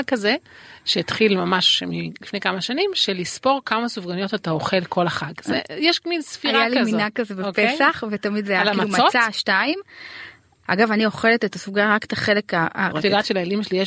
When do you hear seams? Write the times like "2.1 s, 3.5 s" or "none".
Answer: 10.6 s, 12.9 s